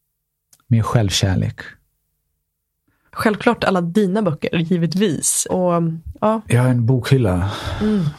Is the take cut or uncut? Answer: cut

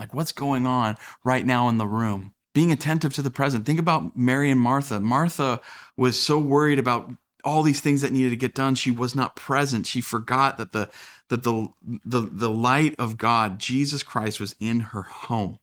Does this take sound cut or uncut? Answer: uncut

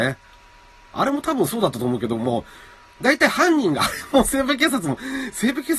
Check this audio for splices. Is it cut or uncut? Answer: cut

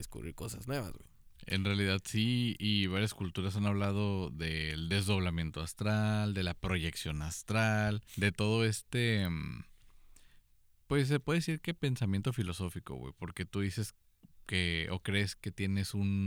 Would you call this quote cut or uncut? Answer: cut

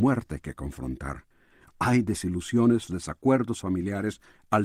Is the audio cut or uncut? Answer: cut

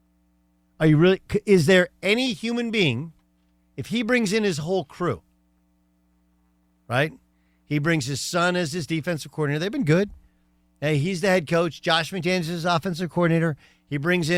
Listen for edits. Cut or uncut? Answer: uncut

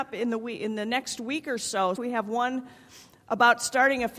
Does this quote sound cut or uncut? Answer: cut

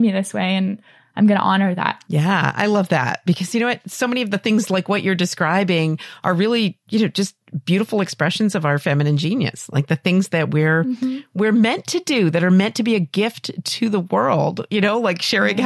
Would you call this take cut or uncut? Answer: uncut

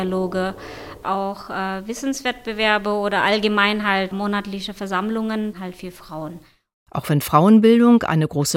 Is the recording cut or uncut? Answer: uncut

